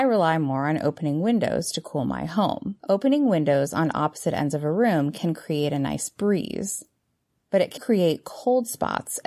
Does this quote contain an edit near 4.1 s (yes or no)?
no